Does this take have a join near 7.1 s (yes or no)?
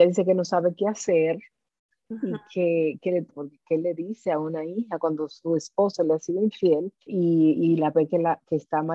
yes